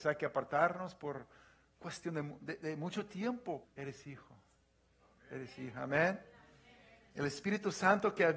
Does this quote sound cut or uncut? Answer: cut